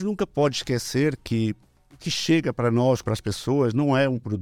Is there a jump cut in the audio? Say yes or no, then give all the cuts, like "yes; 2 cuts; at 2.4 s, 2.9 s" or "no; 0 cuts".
yes; 1 cut; at 3.0 s